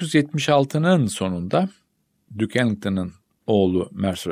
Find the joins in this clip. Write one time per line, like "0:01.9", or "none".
none